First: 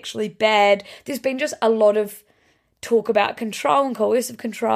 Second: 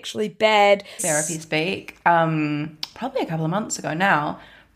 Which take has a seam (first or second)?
second